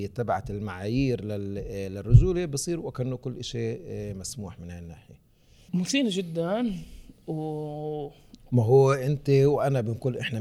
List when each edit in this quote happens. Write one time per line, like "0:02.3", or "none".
0:08.5